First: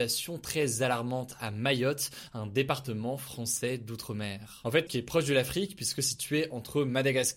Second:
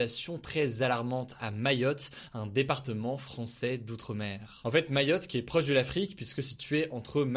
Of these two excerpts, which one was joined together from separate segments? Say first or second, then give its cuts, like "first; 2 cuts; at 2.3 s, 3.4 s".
first; 1 cut; at 4.9 s